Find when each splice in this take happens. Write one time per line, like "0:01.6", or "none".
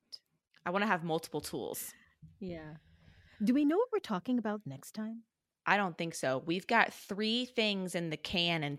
none